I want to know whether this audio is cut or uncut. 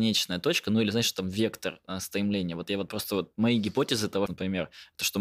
cut